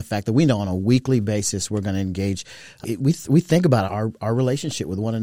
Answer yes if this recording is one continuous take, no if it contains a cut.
no